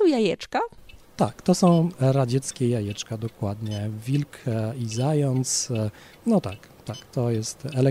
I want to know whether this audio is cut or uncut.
uncut